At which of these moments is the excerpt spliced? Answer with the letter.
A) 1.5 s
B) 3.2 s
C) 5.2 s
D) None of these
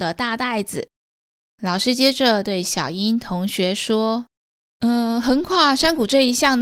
A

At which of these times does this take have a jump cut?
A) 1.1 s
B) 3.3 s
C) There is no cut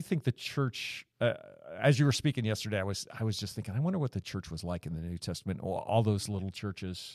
A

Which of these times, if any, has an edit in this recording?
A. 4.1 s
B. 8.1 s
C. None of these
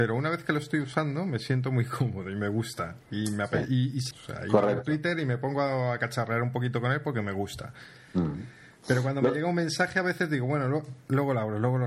A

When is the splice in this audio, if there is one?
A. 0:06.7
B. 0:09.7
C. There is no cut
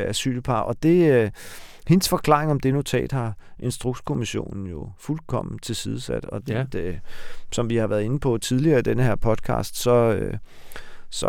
A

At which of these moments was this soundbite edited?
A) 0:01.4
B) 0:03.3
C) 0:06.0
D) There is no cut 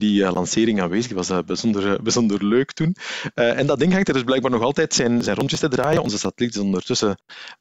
D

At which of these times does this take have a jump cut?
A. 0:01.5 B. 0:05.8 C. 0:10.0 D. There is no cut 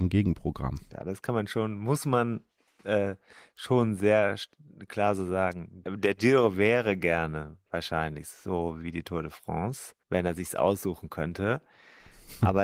C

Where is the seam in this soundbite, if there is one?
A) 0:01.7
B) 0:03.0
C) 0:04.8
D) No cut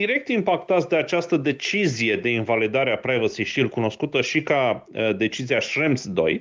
D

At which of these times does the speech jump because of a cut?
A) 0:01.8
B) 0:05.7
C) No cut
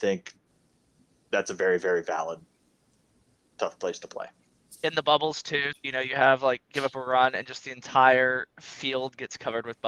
B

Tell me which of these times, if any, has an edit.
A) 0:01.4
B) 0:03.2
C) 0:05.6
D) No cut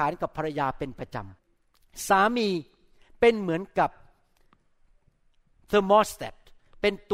A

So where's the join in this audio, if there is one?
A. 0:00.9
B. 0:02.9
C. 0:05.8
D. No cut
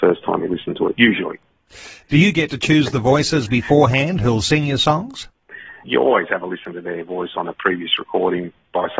C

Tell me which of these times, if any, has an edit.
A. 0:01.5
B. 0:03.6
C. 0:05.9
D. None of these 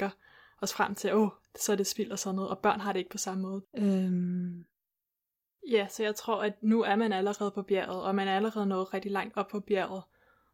B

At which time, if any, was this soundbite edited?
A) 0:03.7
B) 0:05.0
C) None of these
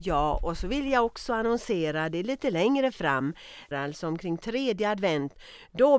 A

